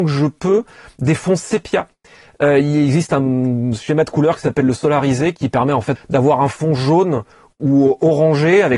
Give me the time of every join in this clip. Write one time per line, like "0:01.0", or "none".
0:06.0